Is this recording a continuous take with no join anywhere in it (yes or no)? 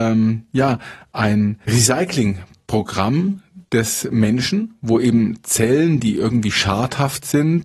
no